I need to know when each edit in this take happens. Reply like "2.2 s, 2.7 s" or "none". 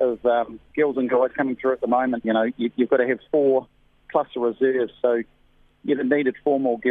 2.2 s